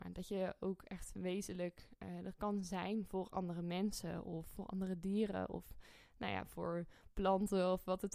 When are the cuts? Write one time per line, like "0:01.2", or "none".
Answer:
none